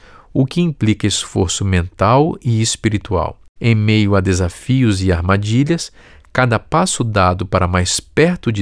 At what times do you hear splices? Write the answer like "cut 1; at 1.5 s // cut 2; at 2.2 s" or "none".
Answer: cut 1; at 3.6 s